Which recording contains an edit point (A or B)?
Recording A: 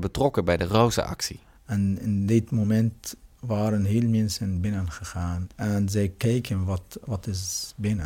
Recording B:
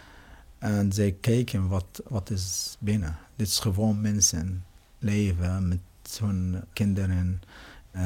A